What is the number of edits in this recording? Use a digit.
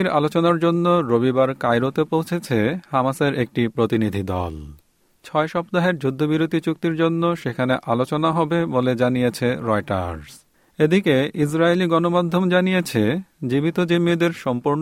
0